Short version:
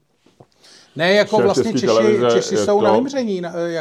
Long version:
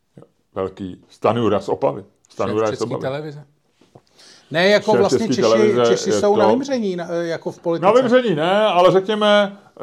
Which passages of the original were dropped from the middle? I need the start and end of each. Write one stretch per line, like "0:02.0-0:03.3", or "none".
none